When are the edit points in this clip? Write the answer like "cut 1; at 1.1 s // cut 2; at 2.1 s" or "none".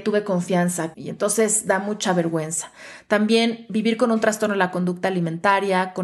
cut 1; at 0.9 s